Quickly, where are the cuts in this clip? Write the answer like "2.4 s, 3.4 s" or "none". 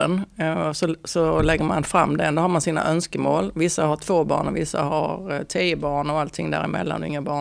none